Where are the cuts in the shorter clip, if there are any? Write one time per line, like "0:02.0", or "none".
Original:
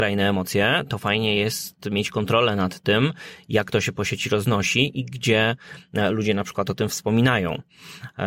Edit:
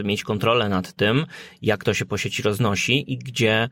none